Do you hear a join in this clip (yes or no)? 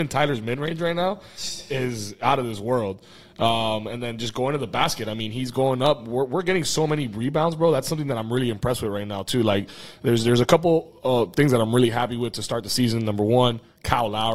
no